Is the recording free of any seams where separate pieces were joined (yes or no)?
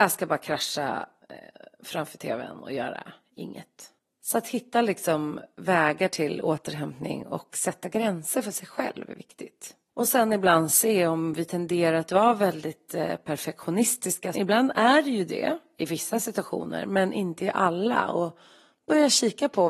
no